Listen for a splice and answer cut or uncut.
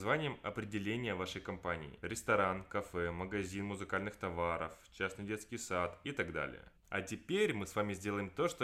cut